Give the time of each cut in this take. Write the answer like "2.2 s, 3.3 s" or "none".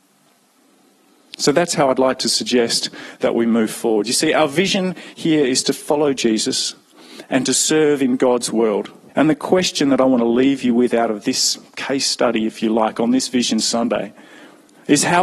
9.1 s